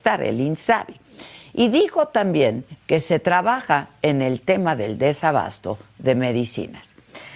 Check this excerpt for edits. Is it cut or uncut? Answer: uncut